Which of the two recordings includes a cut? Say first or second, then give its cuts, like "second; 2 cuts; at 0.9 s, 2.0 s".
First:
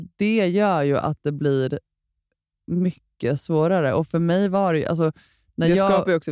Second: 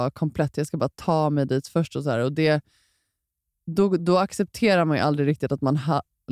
second; 1 cut; at 4.0 s